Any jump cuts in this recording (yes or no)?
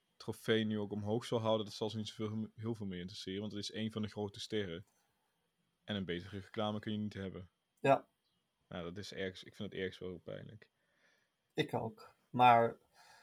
no